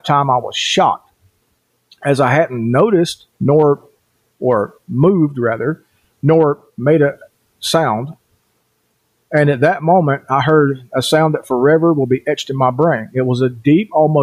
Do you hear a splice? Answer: yes; 1 cut; at 3.3 s

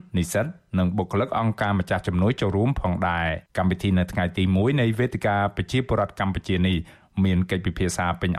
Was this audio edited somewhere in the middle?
yes; 1 cut; at 3.5 s

